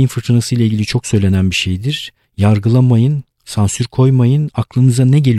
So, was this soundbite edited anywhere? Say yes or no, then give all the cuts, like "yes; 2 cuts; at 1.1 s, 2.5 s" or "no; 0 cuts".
no; 0 cuts